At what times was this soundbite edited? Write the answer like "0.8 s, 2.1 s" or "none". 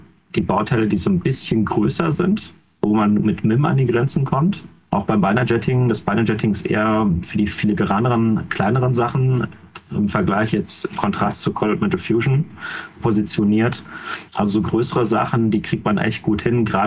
14.3 s